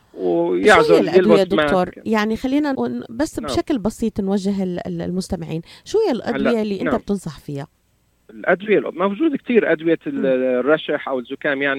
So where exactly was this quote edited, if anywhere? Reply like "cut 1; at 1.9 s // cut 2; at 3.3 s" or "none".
cut 1; at 2.7 s